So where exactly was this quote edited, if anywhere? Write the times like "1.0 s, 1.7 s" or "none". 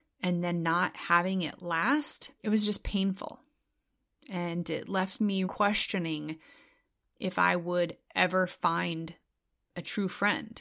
2.4 s, 5.4 s